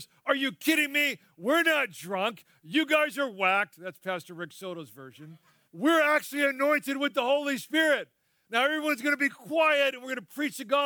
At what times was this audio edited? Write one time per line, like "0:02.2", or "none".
0:05.6